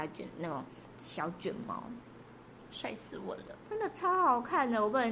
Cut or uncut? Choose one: cut